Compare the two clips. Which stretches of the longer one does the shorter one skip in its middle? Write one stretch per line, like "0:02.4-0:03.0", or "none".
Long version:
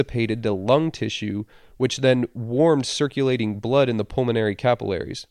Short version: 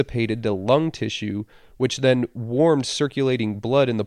none